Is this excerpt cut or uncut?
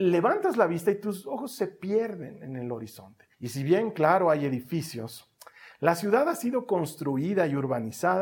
cut